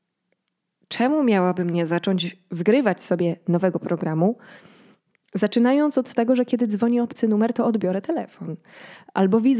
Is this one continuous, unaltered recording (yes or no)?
yes